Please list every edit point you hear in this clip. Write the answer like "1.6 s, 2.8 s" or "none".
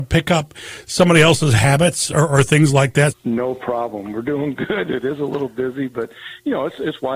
3.1 s